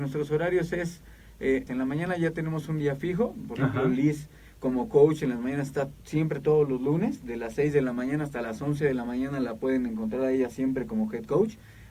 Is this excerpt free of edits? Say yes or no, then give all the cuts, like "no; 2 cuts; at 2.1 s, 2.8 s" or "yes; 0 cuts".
no; 1 cut; at 1.7 s